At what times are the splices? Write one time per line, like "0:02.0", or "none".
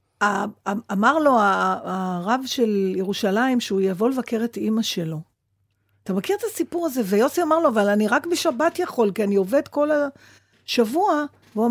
none